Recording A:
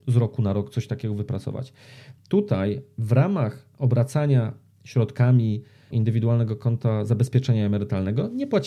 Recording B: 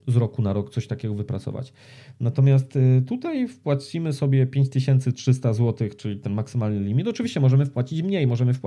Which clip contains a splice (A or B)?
A